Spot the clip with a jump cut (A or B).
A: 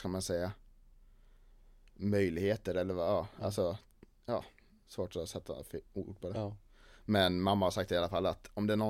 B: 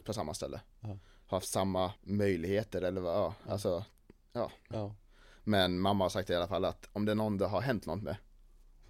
B